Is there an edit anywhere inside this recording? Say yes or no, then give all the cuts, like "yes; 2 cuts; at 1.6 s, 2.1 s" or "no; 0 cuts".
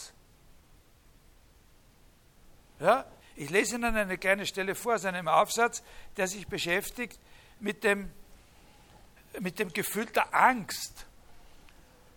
yes; 1 cut; at 3.2 s